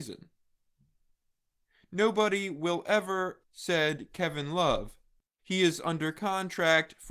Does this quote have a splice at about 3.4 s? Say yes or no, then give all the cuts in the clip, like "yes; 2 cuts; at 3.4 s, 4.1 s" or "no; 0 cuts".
yes; 2 cuts; at 3.4 s, 5.4 s